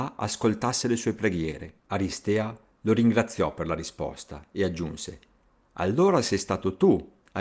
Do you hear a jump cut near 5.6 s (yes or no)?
no